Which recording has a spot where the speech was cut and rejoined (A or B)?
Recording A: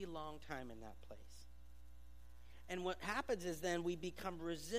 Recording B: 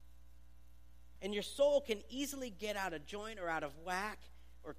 B